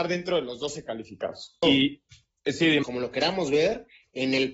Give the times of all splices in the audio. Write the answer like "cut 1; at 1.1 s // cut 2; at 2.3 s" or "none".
cut 1; at 1.6 s // cut 2; at 2.8 s